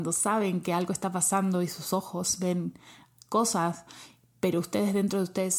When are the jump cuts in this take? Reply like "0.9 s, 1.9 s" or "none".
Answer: none